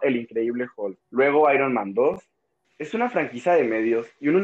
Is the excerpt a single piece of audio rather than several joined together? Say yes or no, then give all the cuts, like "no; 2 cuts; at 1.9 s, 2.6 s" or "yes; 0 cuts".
no; 2 cuts; at 1.0 s, 2.6 s